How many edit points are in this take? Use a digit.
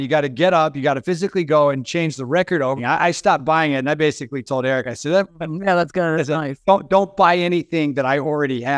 2